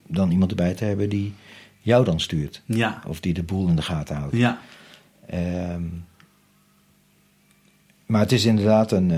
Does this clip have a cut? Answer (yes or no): no